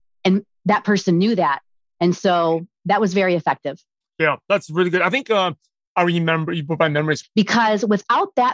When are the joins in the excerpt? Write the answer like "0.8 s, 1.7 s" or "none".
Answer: 7.2 s